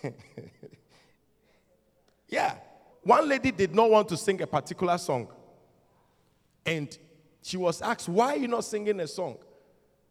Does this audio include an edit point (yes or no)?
yes